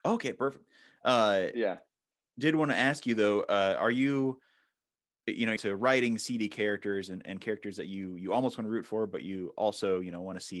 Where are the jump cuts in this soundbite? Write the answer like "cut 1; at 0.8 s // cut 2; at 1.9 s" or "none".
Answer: cut 1; at 5.6 s